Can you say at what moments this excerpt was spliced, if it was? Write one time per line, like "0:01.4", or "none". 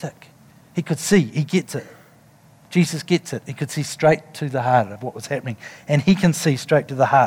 none

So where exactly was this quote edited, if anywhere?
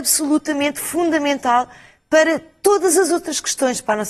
none

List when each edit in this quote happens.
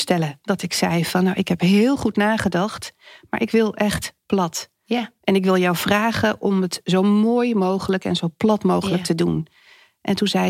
none

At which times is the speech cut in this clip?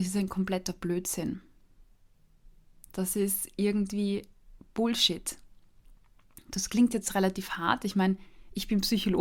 none

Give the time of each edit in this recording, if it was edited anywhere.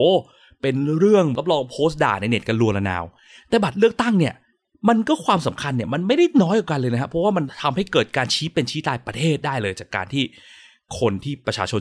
none

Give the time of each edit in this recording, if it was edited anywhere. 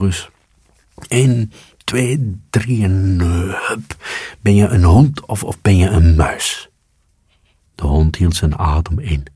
0:05.2
0:07.6

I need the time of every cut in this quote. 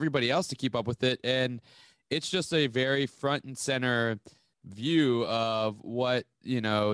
none

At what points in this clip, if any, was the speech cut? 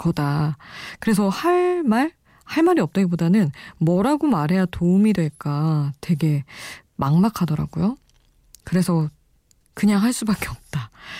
0:09.6

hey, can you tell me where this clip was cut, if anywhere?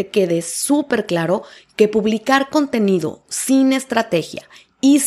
none

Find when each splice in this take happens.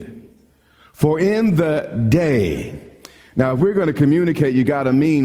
none

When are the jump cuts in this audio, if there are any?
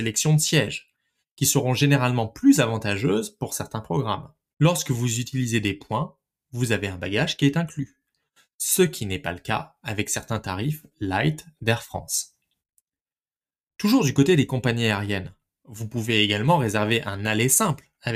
0:04.5

